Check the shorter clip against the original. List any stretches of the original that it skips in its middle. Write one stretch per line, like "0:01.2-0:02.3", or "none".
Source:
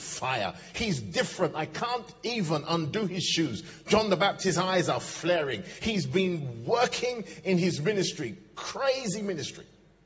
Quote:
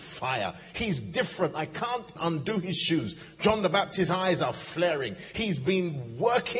0:02.2-0:02.6

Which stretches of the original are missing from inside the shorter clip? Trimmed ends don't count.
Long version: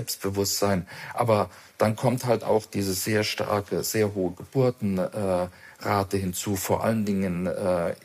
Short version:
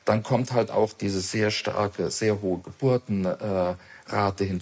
none

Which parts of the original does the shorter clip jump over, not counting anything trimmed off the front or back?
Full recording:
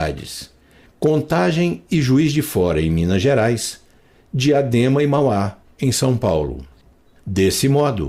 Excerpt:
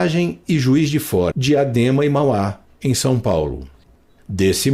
0:02.7-0:04.3

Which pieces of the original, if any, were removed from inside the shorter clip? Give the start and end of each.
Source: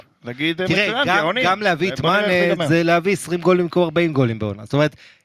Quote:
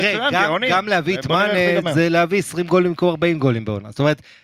none

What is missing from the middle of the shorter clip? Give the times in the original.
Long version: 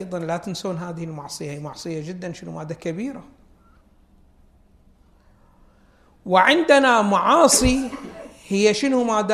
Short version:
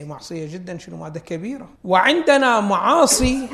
0:03.3-0:06.2

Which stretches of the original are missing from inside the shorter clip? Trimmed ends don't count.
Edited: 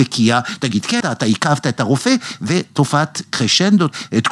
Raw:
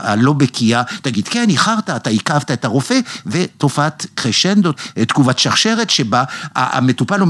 0:01.4-0:01.8

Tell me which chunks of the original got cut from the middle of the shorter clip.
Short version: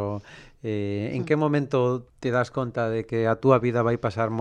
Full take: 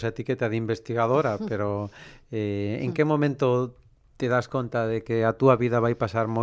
0:03.8-0:04.1

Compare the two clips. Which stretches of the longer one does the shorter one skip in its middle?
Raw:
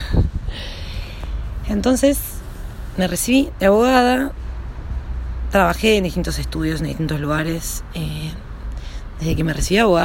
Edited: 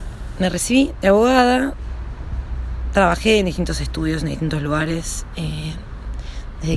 none

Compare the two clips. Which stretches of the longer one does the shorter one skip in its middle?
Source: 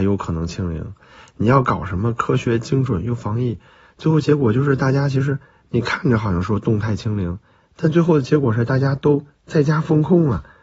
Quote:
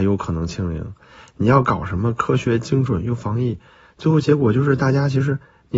none

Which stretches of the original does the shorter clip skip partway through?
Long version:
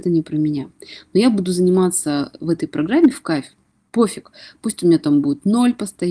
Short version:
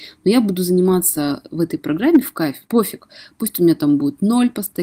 0:03.5-0:03.9

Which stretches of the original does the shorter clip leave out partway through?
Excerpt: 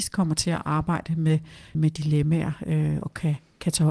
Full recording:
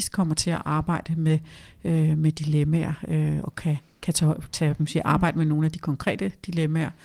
0:01.7-0:02.2

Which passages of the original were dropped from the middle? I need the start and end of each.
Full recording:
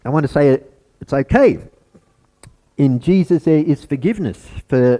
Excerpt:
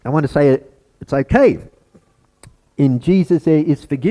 none

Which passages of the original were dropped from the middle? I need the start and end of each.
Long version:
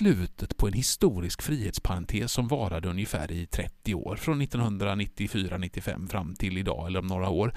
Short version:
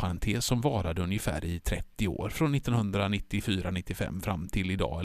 none

